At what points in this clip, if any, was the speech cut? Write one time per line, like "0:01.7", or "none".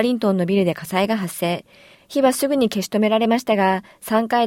0:01.9